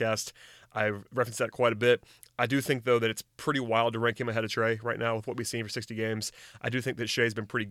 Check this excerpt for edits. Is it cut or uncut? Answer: uncut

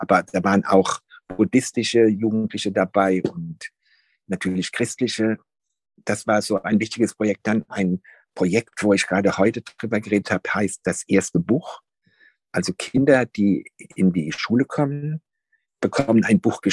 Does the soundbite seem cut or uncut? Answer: uncut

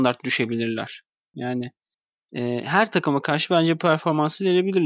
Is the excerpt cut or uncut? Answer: cut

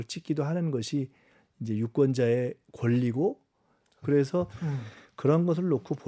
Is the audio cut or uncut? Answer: cut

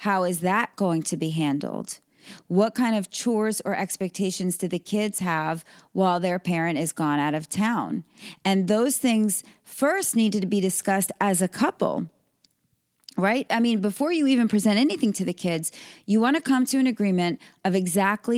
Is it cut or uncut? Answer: uncut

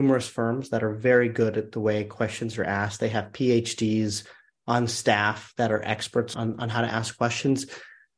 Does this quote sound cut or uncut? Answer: cut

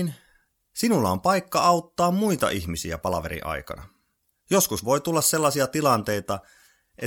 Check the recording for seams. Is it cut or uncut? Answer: uncut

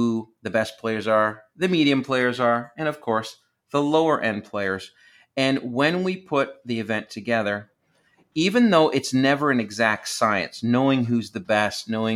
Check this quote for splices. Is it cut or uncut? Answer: uncut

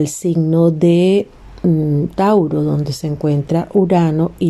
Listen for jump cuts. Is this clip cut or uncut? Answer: uncut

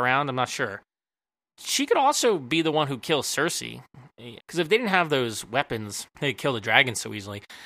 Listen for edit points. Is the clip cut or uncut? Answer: cut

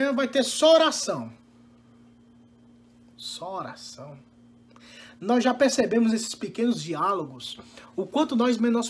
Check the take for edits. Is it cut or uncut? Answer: uncut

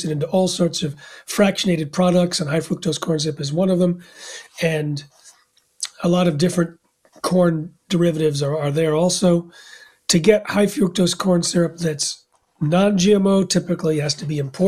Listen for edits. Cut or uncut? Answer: uncut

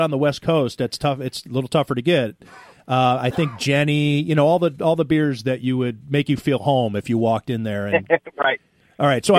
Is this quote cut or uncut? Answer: uncut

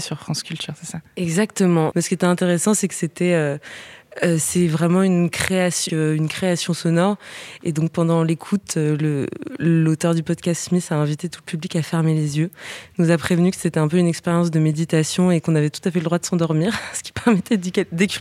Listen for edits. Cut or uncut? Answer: cut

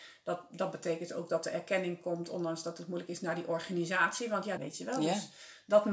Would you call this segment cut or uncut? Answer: cut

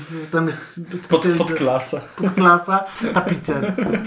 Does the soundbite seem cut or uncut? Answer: uncut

